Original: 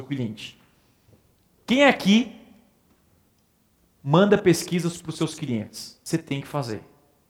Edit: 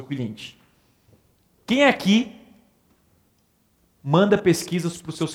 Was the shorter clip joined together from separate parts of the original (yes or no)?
no